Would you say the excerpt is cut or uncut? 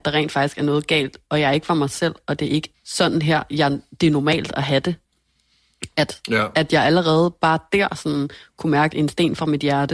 cut